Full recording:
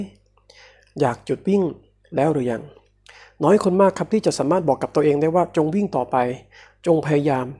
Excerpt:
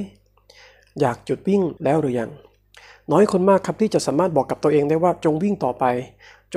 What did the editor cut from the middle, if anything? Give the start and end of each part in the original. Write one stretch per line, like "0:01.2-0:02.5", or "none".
0:01.8-0:02.1